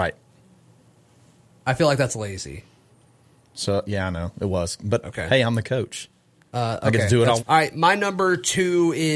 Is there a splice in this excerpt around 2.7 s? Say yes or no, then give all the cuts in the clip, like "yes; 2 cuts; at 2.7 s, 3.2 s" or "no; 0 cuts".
no; 1 cut; at 7.4 s